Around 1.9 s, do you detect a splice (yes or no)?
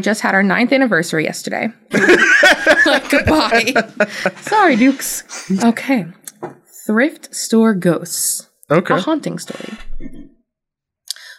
yes